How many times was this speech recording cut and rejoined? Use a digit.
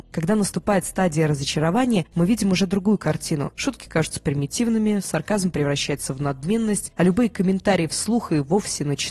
0